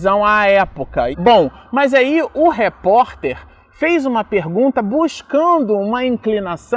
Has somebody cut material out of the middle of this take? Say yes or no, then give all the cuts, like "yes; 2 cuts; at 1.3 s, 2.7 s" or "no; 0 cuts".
yes; 1 cut; at 1.1 s